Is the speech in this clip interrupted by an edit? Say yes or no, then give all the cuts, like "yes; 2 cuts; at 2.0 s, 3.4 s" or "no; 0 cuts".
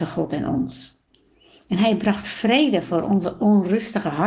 no; 0 cuts